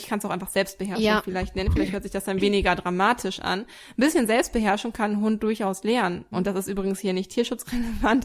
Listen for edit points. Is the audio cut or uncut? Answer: cut